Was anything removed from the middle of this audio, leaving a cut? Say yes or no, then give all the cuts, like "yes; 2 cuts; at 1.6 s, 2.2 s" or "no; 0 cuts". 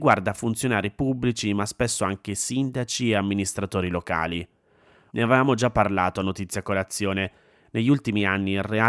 yes; 1 cut; at 5.1 s